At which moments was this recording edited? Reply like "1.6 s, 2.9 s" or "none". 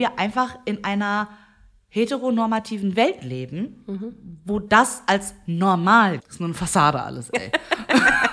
6.2 s